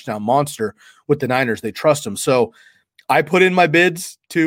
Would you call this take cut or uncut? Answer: uncut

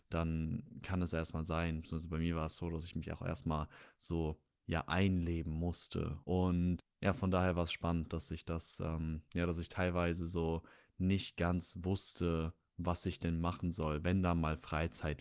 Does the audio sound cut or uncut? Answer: cut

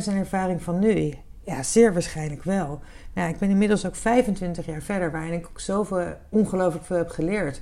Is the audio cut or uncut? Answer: uncut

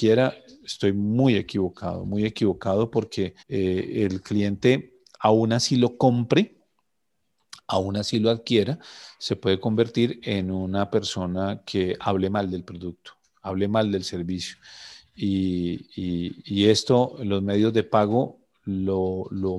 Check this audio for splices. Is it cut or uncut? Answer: cut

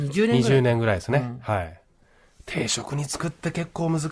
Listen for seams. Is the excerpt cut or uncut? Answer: uncut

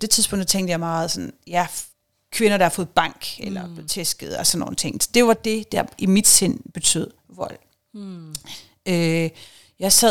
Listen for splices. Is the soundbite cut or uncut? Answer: uncut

